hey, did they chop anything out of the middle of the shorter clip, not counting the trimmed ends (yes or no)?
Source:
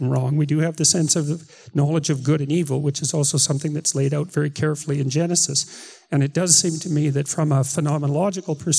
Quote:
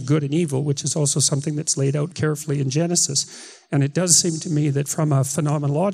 yes